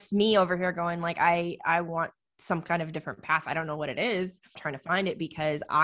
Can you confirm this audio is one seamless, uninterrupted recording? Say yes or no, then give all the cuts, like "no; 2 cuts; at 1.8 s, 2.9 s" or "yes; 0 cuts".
no; 1 cut; at 4.6 s